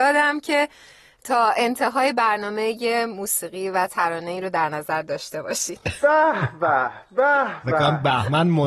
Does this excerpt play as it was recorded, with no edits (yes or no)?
yes